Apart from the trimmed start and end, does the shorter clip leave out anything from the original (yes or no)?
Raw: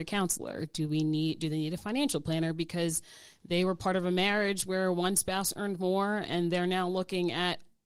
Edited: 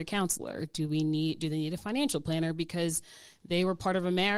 no